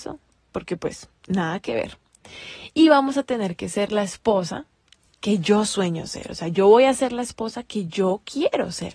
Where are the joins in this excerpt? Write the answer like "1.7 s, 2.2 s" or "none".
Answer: none